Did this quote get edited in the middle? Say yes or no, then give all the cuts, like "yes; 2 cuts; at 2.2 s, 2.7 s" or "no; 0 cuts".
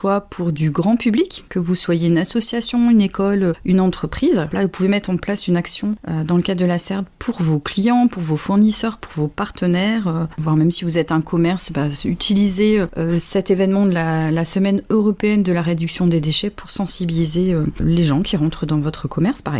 no; 0 cuts